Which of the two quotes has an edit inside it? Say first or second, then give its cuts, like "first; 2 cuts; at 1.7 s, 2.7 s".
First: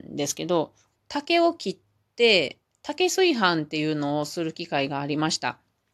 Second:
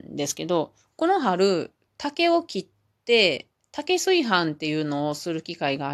first; 1 cut; at 1.0 s